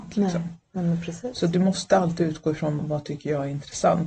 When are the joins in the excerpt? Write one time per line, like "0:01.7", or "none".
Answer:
0:02.8